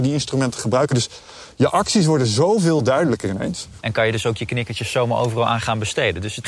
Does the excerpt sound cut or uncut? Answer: cut